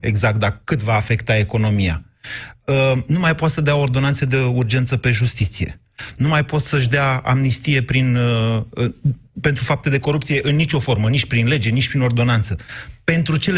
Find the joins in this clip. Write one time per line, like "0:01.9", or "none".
none